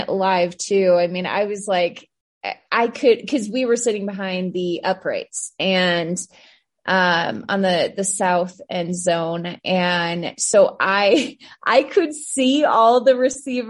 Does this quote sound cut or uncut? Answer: uncut